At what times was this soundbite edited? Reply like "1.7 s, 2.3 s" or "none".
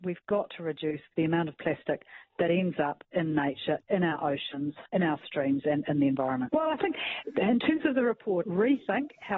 4.9 s, 6.5 s, 8.4 s